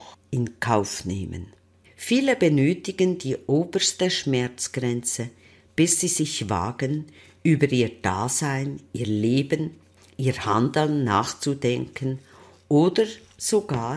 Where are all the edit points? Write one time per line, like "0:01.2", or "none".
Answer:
0:01.8